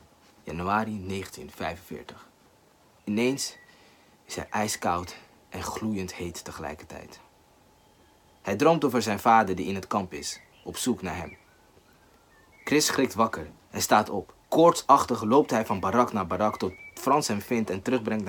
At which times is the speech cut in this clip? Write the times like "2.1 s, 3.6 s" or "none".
3.0 s, 14.4 s